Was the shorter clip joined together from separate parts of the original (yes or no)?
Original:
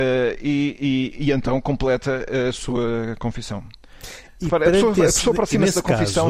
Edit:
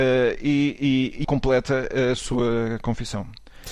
yes